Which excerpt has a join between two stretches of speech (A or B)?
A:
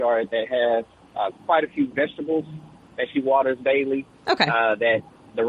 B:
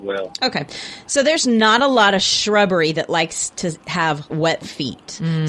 B